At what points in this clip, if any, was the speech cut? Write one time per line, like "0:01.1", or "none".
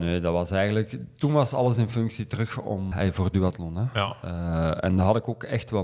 0:02.9